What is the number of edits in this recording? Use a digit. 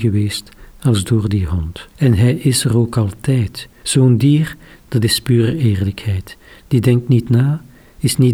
2